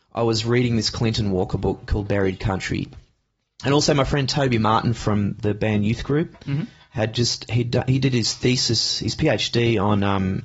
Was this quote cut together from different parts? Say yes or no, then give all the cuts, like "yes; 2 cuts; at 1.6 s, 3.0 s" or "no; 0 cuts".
no; 0 cuts